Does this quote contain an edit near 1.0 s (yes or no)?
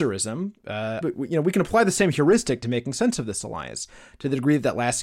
yes